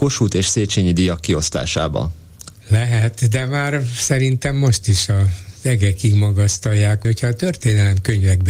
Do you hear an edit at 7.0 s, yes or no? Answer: yes